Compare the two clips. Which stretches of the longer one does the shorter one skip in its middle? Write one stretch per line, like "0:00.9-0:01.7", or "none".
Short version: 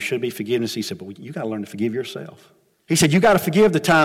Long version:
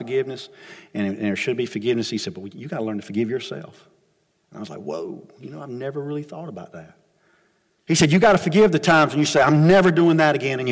0:04.1-0:07.7